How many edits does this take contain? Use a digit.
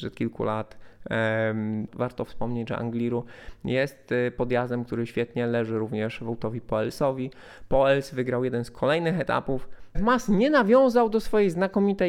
2